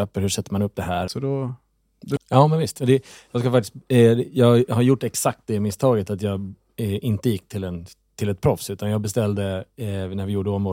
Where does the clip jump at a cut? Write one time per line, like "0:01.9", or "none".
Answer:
0:01.1
0:02.2